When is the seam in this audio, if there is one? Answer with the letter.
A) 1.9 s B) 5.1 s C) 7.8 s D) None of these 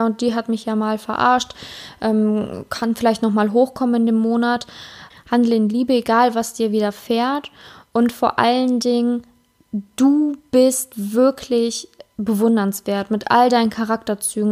B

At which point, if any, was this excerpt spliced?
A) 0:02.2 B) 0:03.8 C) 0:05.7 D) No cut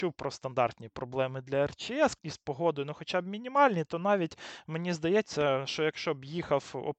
A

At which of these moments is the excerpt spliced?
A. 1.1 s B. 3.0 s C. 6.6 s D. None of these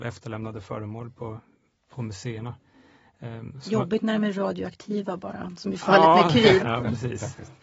C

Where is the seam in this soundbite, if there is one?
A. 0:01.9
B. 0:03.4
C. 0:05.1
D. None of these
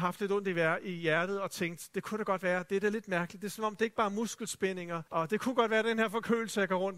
C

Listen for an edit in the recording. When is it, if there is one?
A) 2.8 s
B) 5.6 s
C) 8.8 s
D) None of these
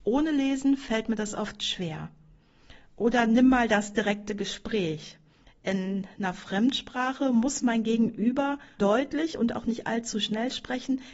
C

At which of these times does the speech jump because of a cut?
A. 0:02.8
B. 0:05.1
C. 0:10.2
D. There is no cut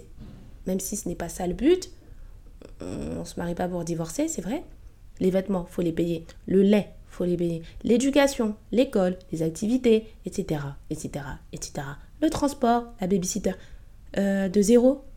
B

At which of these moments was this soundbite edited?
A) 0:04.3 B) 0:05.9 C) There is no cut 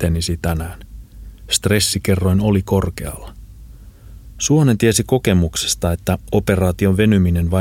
C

